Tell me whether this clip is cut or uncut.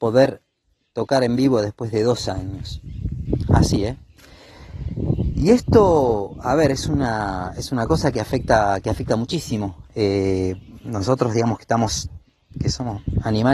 uncut